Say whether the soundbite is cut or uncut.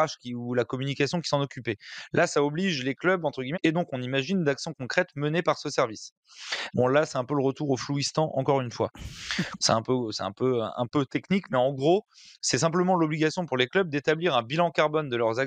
cut